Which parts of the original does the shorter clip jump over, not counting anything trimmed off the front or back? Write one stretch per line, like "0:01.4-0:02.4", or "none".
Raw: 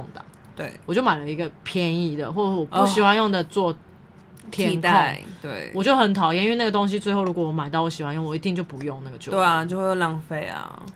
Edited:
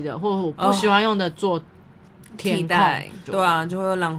0:05.4-0:09.2